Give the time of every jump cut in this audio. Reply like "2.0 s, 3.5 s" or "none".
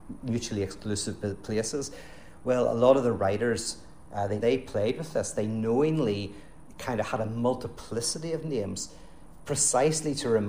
4.4 s